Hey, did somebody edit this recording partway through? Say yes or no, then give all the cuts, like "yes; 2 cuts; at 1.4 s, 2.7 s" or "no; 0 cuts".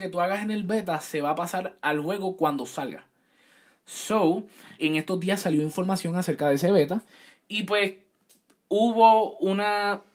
yes; 1 cut; at 4.8 s